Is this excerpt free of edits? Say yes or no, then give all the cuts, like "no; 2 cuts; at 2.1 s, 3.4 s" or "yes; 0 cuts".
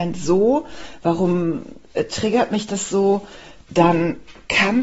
yes; 0 cuts